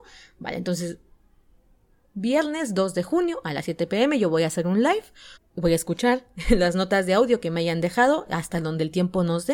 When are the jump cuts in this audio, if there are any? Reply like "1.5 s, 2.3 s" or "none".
5.4 s